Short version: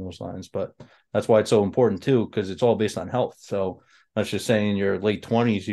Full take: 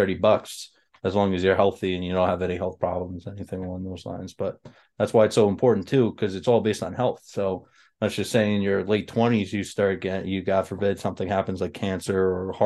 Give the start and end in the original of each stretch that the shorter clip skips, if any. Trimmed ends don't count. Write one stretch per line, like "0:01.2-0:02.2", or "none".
none